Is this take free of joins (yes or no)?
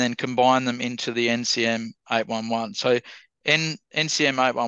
yes